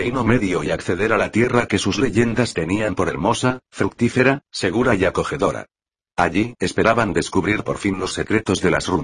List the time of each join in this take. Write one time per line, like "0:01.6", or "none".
0:06.6